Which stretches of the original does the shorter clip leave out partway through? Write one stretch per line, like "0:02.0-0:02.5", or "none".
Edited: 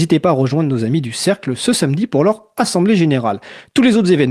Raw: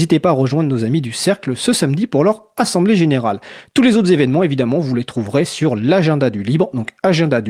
none